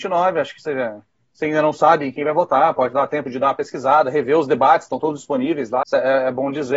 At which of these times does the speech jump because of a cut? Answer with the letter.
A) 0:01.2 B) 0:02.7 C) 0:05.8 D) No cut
C